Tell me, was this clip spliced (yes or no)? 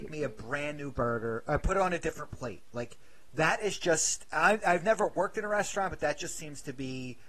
no